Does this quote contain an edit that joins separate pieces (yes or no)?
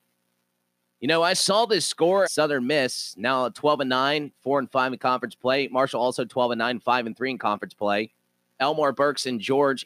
yes